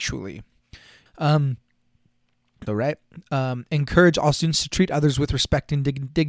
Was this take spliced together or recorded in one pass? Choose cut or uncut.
cut